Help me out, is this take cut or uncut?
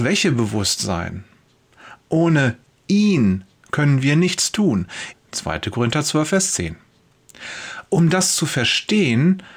cut